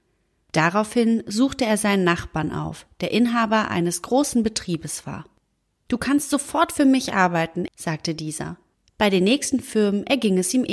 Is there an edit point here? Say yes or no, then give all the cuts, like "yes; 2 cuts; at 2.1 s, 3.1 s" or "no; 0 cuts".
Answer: yes; 1 cut; at 7.7 s